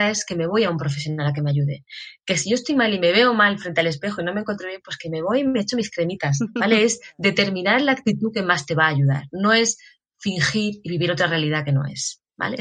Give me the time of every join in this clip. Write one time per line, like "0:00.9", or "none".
none